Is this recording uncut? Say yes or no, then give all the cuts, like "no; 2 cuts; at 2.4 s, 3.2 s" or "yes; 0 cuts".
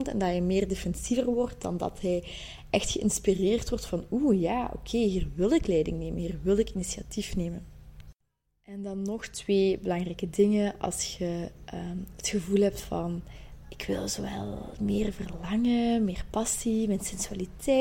yes; 0 cuts